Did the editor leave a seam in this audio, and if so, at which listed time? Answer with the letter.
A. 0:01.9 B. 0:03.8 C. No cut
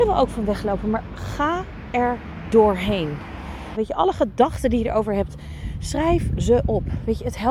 B